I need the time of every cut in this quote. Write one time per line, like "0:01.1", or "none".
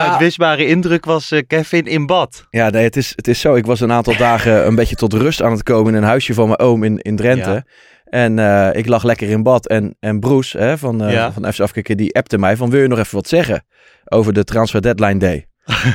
none